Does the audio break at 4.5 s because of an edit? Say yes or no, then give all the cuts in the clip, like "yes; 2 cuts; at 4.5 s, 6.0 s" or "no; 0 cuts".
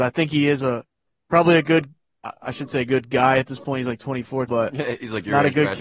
yes; 1 cut; at 4.5 s